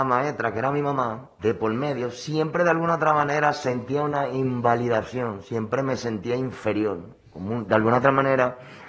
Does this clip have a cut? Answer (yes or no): no